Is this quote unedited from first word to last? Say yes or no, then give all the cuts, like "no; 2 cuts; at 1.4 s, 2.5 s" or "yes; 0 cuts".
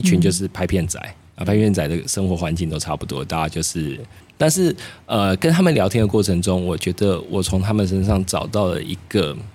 no; 1 cut; at 4.2 s